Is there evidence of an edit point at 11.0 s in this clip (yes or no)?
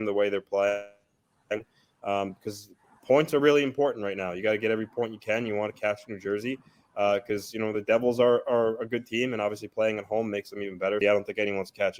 yes